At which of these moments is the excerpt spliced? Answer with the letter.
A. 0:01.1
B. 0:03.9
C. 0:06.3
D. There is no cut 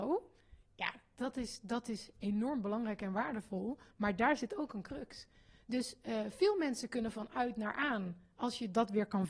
D